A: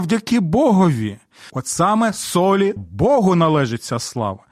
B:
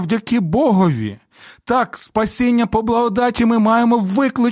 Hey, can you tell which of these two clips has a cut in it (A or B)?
A